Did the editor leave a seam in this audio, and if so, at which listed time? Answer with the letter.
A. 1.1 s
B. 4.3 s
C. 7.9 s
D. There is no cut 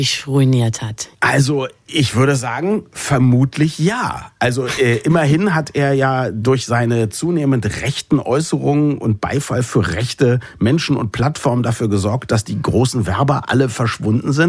A